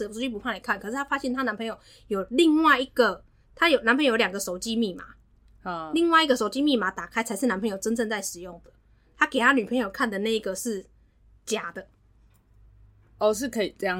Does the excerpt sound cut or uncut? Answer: uncut